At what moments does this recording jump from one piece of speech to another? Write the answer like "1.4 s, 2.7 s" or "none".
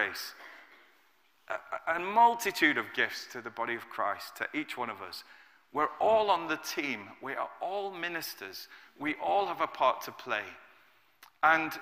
none